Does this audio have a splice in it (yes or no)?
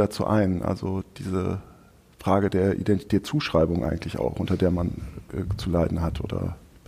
no